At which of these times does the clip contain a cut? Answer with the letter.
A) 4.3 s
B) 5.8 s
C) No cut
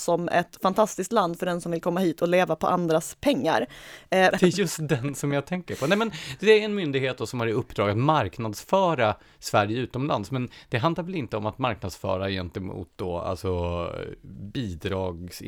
A